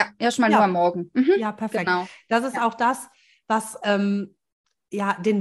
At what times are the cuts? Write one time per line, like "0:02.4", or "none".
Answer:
none